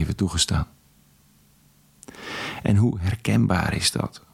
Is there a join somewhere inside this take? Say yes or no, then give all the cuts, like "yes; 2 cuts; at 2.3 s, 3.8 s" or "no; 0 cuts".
no; 0 cuts